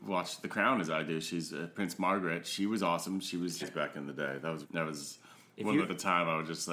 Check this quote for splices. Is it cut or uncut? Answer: cut